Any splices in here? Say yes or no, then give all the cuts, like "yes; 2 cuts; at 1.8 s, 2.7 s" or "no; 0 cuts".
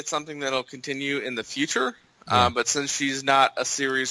no; 0 cuts